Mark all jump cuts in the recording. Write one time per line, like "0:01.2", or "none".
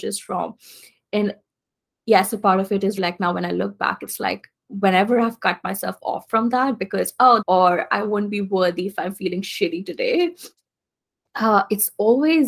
0:03.0
0:07.4